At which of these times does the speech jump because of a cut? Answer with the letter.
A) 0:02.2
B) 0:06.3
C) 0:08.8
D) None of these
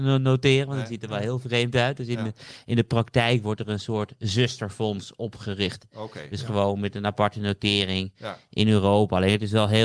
D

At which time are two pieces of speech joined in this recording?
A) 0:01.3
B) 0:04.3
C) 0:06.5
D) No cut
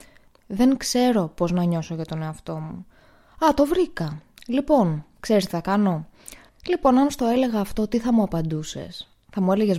C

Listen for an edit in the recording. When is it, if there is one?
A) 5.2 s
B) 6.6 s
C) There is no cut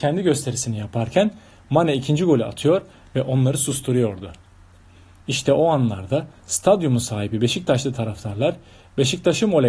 A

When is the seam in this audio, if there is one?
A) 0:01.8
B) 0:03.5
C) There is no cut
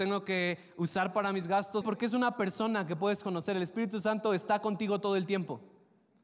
A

